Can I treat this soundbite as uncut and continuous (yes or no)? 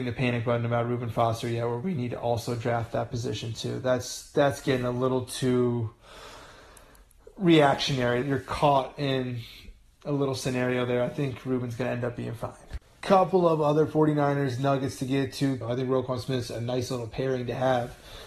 no